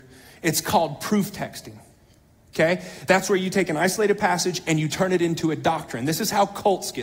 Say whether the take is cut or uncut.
uncut